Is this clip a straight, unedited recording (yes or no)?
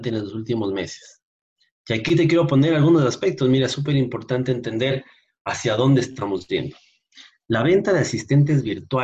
yes